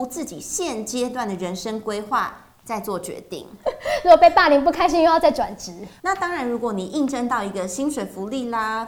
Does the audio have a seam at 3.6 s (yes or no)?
yes